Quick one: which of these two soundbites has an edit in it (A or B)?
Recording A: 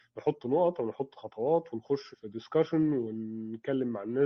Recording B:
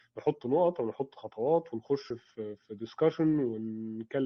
A